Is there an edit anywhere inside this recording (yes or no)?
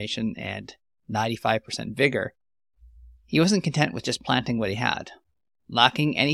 no